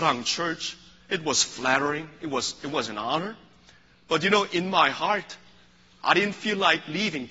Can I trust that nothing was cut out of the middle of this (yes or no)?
yes